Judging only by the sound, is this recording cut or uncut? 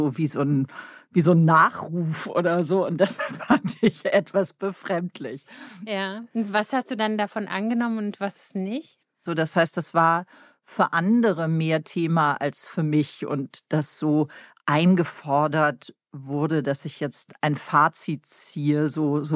cut